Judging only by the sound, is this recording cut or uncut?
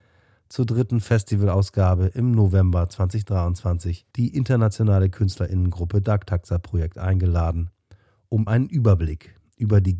cut